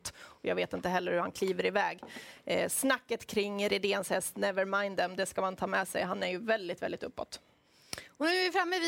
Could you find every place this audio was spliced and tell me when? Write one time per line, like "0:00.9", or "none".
none